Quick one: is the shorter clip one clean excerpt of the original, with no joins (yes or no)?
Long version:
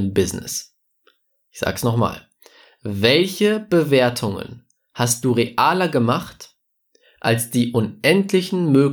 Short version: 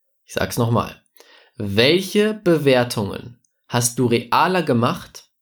yes